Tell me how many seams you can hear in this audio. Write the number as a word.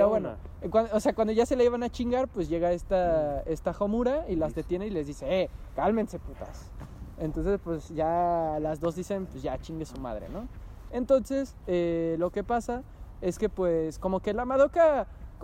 one